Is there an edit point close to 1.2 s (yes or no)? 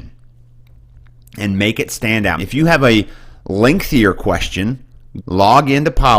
no